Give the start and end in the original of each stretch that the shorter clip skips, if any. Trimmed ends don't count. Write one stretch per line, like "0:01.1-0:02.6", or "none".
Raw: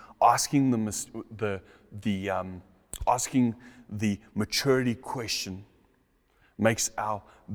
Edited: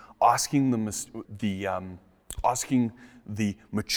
0:01.2-0:01.9